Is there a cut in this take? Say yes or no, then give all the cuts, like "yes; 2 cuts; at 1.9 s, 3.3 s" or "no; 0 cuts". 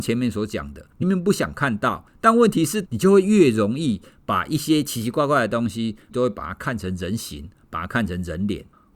yes; 3 cuts; at 1.0 s, 2.8 s, 6.1 s